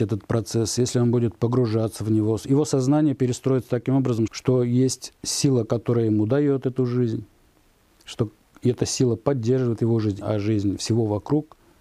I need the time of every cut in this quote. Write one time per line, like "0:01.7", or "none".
0:04.3
0:10.2